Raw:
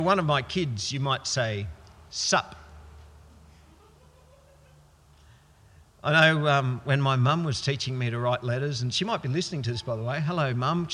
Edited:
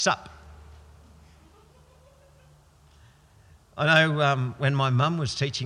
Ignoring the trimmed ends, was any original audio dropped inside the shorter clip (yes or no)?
no